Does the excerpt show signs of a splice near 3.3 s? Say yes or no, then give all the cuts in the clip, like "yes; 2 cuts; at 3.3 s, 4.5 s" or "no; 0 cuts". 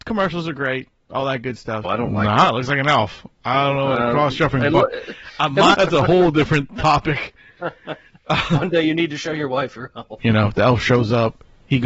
no; 3 cuts; at 1.8 s, 5.7 s, 10.2 s